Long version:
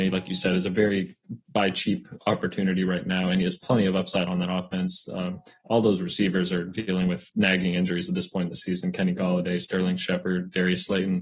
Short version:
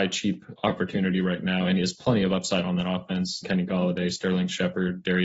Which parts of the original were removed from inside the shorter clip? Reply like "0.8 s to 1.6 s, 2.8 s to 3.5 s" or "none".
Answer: 5.1 s to 8.9 s